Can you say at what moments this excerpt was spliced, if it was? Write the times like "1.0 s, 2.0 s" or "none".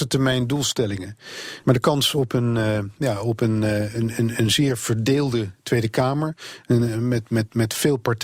1.6 s